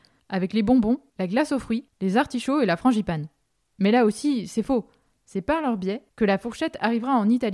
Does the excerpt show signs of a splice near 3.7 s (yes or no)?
no